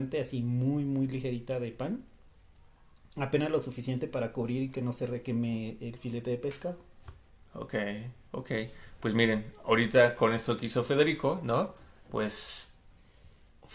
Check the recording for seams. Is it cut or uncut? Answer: uncut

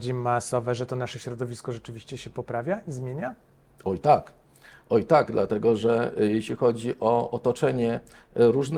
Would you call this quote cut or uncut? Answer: uncut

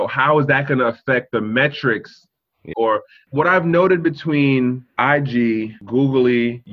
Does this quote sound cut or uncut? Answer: cut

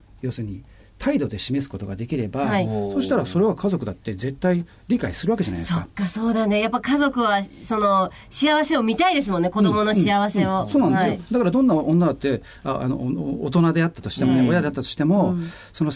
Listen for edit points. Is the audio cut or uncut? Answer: uncut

